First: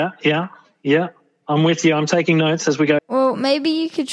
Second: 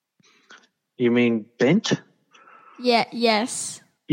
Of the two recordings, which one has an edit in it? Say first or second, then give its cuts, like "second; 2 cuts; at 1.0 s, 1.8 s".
first; 1 cut; at 3.0 s